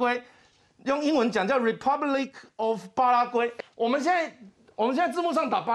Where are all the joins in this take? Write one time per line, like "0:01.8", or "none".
0:03.6